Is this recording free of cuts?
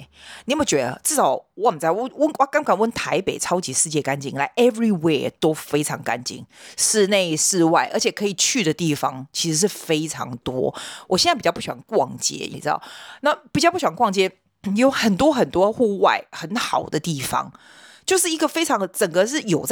no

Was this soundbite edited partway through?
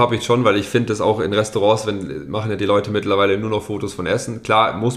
no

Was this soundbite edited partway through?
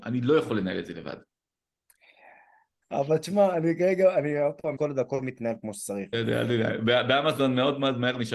yes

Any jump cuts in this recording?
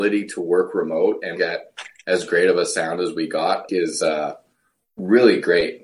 yes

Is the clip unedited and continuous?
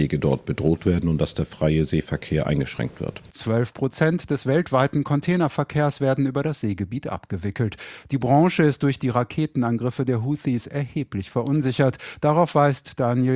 yes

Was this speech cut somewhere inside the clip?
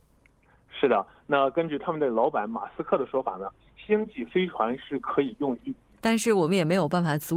yes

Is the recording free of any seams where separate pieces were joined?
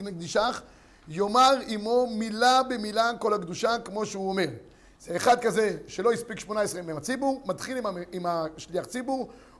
yes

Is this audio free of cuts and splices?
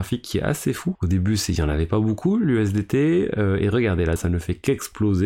no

